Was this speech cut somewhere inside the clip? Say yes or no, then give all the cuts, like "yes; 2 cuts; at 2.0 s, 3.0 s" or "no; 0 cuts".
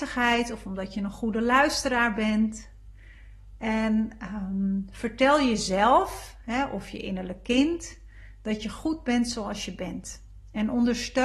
no; 0 cuts